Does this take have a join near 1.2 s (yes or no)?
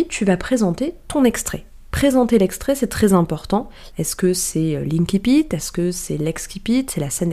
no